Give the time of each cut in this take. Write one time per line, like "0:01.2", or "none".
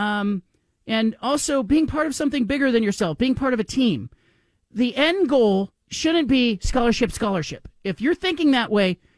0:05.8
0:07.1